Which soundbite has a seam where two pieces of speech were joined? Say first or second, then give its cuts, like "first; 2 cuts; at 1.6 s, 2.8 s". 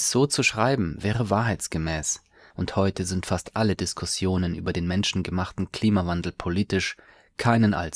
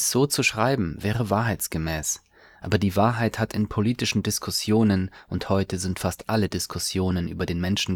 first; 1 cut; at 2.5 s